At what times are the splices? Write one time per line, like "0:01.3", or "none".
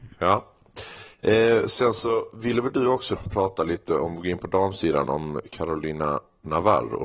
0:03.2